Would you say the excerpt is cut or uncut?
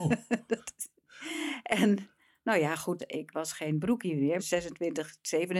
cut